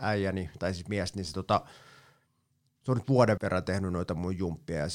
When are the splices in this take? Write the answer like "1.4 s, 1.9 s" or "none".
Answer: 3.4 s